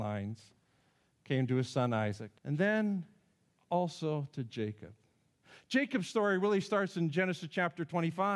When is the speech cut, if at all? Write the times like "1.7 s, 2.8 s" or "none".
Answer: 2.4 s